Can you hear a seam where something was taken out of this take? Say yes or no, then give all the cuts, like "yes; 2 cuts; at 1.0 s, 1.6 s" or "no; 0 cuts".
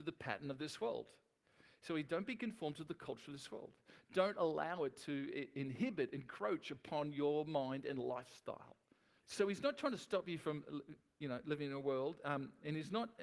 yes; 1 cut; at 9.2 s